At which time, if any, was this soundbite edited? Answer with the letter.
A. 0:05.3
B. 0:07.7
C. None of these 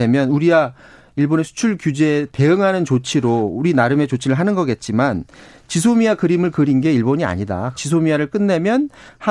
B